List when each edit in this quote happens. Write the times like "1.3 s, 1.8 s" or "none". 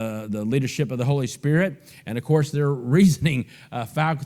none